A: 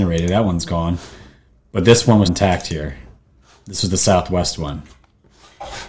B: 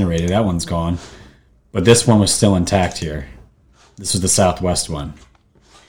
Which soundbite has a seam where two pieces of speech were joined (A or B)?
A